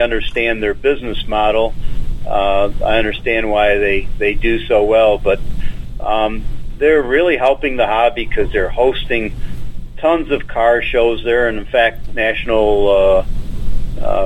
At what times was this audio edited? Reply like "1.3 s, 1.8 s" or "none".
12.1 s